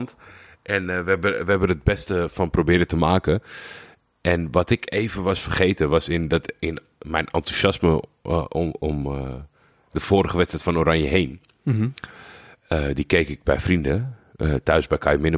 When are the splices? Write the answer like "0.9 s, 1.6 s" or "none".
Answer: none